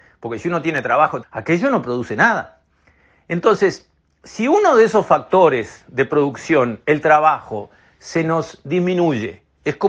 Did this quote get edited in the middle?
yes; 1 cut; at 1.2 s

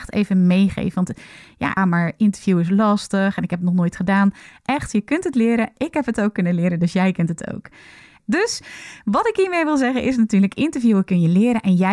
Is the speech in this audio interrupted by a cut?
yes; 2 cuts; at 1.8 s, 8.2 s

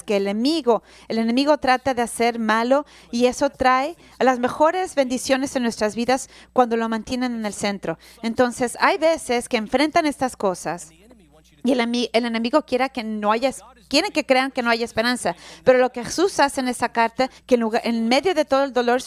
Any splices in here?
yes; 1 cut; at 17.4 s

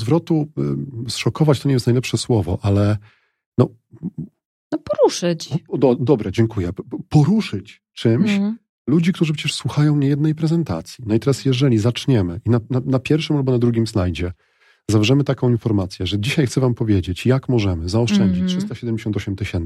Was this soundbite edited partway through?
no; 0 cuts

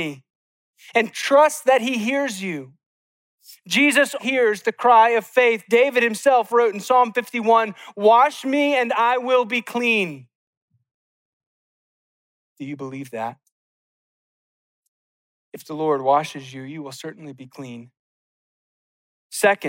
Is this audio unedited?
no; 1 cut; at 4.2 s

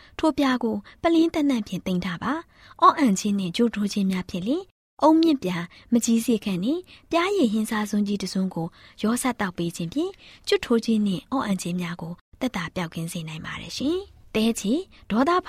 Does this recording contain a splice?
no; 0 cuts

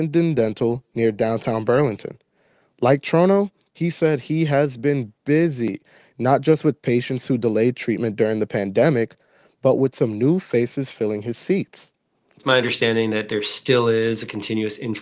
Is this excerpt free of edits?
yes; 0 cuts

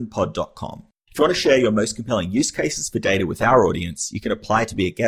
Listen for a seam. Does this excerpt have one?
yes; 1 cut; at 1.0 s

